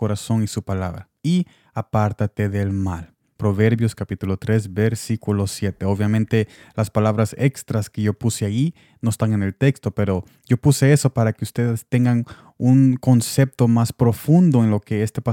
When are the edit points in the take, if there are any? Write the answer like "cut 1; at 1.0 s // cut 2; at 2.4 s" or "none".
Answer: none